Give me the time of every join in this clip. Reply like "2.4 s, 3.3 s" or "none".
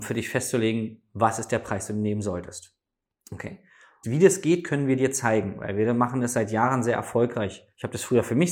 4.0 s